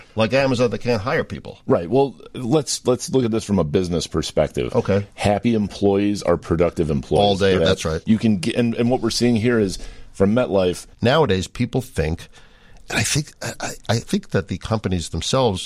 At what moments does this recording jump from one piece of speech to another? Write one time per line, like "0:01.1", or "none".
0:07.6
0:10.9